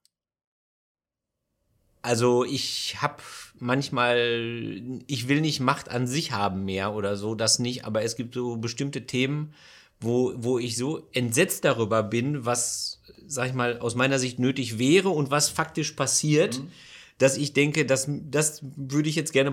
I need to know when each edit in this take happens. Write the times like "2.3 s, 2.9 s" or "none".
none